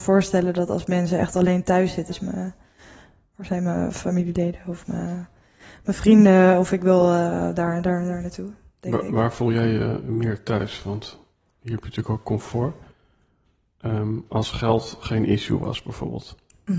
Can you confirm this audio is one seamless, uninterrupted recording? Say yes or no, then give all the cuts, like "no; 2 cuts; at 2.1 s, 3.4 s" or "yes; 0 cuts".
no; 1 cut; at 2.1 s